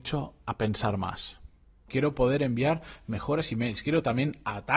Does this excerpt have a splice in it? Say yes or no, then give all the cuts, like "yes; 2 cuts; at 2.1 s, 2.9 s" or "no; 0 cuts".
yes; 1 cut; at 1.9 s